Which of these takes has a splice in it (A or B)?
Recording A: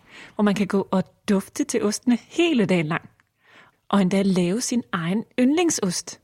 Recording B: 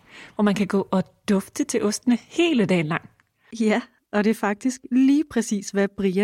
B